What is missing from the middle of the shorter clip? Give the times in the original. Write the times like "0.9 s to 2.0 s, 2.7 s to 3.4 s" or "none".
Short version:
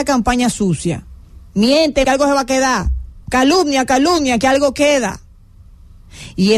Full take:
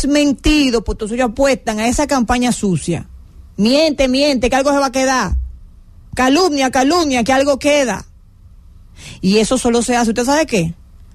4.1 s to 4.5 s, 5.7 s to 6.1 s